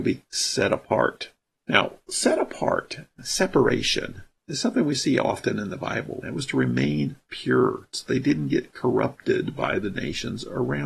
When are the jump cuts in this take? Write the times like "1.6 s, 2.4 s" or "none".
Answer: 6.2 s